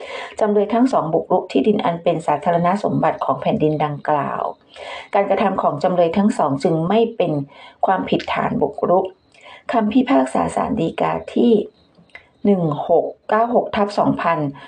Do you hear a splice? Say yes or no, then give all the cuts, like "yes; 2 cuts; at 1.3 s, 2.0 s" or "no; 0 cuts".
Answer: yes; 1 cut; at 13.2 s